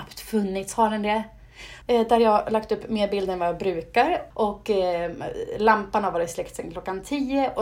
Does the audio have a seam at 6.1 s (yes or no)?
no